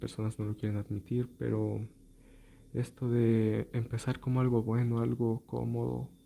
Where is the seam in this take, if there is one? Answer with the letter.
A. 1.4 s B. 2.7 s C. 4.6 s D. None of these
D